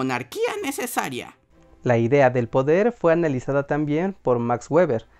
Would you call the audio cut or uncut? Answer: uncut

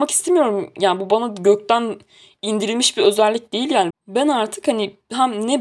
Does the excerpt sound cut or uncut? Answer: cut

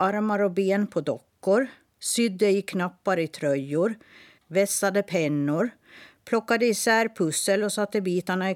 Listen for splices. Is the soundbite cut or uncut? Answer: cut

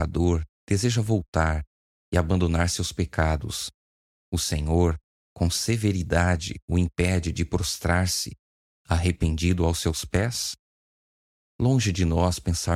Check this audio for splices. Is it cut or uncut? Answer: uncut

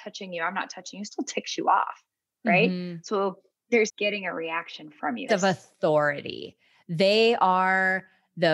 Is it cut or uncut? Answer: cut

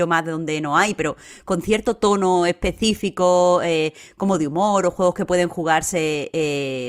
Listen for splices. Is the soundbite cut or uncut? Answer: uncut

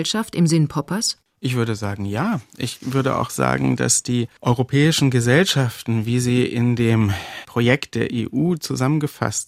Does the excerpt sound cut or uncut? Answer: uncut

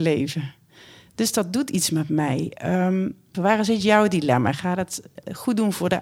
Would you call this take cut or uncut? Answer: cut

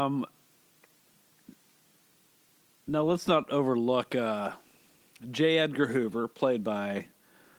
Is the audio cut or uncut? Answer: uncut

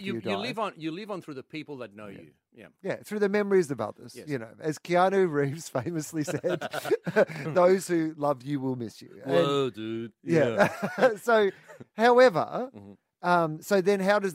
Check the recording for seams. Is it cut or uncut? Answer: uncut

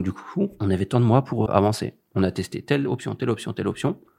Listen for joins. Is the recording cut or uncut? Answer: cut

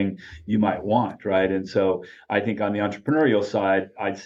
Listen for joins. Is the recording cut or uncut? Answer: uncut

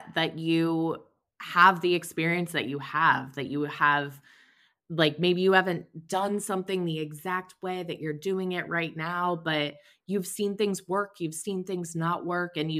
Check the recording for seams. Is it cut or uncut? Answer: uncut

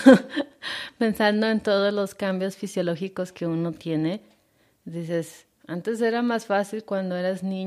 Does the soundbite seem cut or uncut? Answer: uncut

